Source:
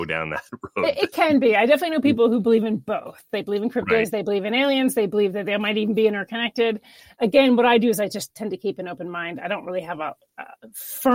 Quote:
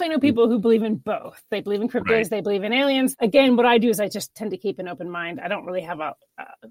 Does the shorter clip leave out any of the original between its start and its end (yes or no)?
yes